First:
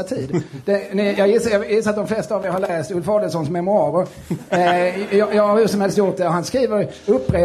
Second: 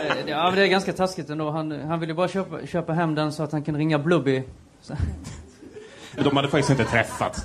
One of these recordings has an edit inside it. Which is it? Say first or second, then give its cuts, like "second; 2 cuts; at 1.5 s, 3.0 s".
second; 1 cut; at 6.2 s